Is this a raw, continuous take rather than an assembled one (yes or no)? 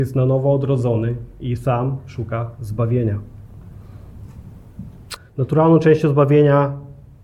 no